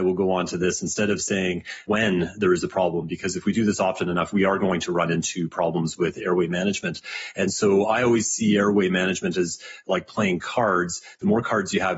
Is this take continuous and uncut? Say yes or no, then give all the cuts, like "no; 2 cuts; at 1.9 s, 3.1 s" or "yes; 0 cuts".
yes; 0 cuts